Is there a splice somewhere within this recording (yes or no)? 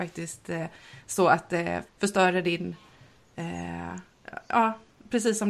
yes